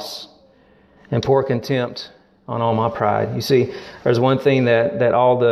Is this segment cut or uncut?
uncut